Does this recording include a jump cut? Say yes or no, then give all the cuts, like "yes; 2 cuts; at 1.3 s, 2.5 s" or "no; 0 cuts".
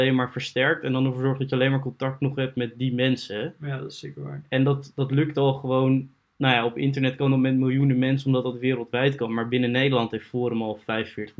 no; 0 cuts